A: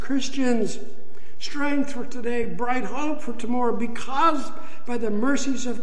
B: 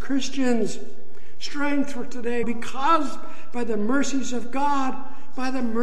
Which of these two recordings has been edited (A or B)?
B